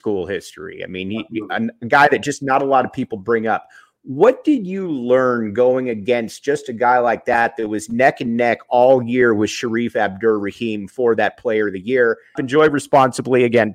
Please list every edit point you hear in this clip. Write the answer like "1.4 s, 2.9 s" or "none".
12.4 s